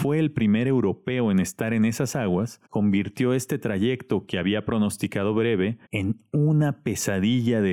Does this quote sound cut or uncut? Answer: cut